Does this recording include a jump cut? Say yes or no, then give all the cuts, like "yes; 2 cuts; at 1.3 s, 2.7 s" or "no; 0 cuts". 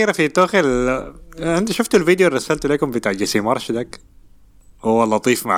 no; 0 cuts